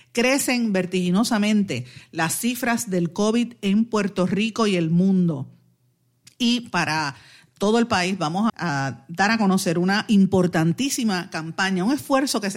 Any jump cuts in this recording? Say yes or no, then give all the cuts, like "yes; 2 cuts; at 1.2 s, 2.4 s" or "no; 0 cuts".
yes; 1 cut; at 8.5 s